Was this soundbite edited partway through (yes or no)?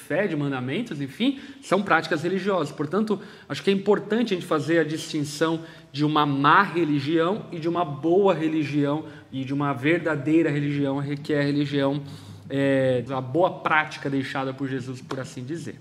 yes